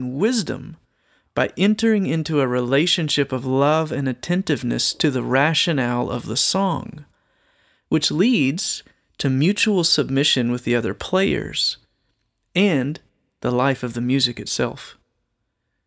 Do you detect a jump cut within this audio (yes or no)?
no